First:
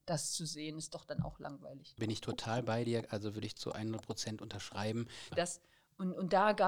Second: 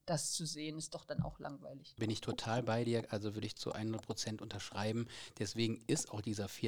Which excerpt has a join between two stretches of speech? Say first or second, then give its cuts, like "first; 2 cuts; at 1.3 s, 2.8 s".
first; 1 cut; at 5.3 s